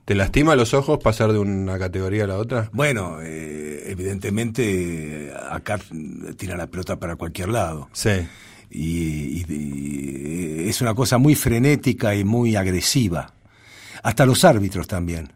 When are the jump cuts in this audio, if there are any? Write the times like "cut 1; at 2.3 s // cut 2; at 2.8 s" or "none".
none